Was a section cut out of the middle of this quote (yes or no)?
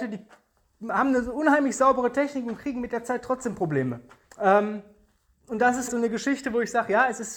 yes